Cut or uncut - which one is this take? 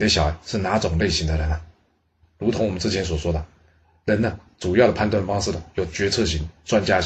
uncut